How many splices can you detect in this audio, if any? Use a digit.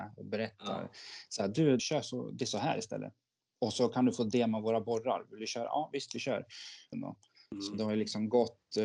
2